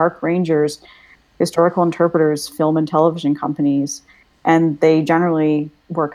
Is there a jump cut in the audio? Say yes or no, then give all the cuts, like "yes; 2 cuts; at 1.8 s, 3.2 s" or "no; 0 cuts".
no; 0 cuts